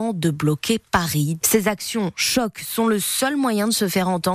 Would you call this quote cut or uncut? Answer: cut